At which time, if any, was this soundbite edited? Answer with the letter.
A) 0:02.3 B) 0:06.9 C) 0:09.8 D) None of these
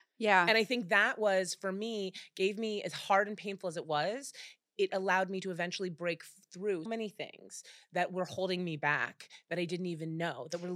B